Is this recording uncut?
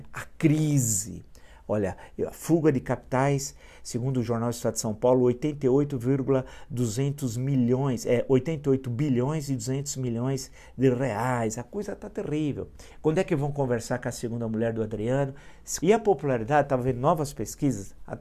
no; 2 cuts; at 12.9 s, 15.8 s

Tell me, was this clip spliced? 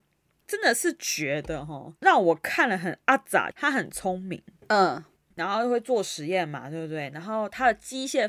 yes; 2 cuts; at 2.0 s, 3.5 s

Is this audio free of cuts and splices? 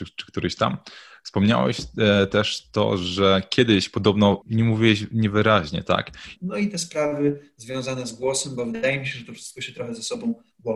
no; 2 cuts; at 4.4 s, 6.4 s

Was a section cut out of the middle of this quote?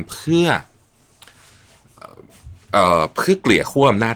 no; 0 cuts

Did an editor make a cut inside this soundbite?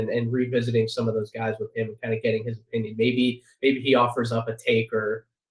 no; 0 cuts

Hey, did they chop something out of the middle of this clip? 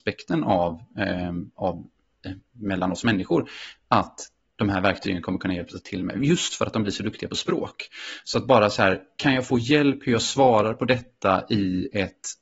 no; 0 cuts

